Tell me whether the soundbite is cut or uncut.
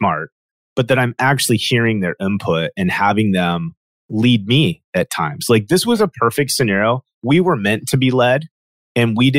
uncut